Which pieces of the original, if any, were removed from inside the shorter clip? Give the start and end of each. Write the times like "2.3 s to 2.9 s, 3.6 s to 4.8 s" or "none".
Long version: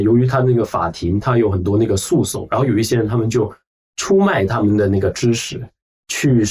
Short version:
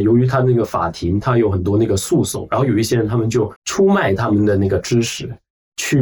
3.6 s to 3.9 s